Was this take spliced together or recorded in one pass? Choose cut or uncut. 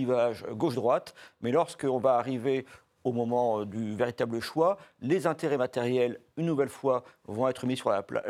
uncut